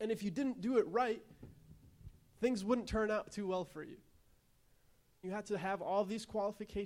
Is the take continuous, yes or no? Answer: no